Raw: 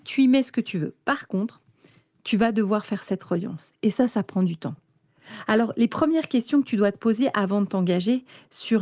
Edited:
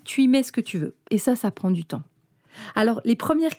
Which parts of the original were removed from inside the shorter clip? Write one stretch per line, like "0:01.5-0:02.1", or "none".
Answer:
0:01.0-0:03.8